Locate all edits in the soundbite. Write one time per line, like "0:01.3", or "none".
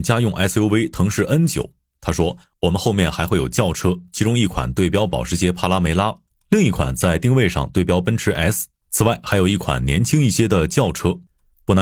none